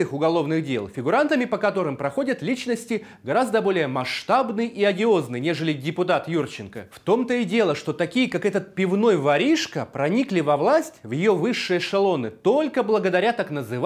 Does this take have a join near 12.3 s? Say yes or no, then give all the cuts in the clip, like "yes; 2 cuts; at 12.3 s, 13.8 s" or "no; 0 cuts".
no; 1 cut; at 6.9 s